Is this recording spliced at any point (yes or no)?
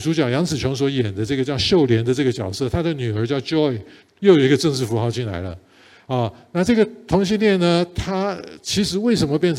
yes